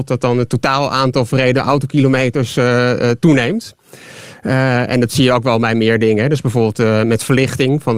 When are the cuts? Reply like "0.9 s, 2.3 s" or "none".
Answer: 3.2 s